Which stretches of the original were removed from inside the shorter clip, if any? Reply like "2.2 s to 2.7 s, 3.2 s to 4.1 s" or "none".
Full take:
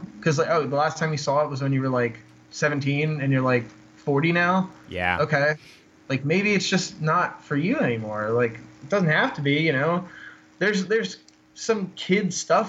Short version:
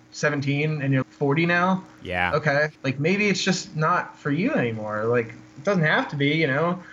3.4 s to 3.9 s, 5.6 s to 6.0 s